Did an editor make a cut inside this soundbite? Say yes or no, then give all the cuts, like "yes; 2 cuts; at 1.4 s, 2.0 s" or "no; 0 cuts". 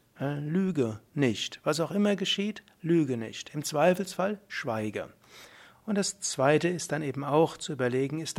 no; 0 cuts